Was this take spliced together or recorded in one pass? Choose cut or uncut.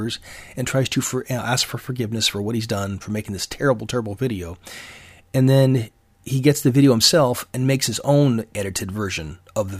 uncut